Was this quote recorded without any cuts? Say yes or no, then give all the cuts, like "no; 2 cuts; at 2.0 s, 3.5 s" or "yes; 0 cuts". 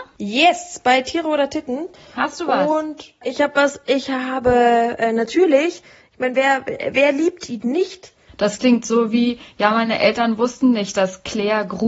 no; 1 cut; at 8.3 s